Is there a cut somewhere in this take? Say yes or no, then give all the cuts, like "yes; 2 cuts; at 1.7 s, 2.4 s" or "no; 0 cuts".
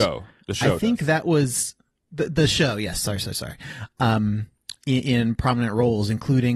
no; 0 cuts